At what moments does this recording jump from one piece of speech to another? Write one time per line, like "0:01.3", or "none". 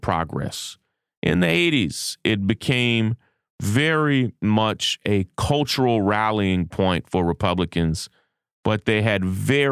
none